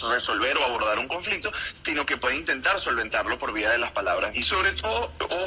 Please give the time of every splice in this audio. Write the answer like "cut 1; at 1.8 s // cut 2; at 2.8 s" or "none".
cut 1; at 4.3 s